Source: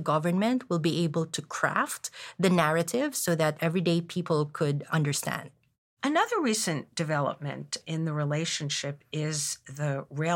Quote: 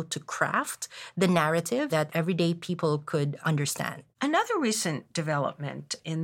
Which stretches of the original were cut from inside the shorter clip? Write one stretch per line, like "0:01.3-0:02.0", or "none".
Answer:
0:03.1-0:03.4
0:05.6-0:05.9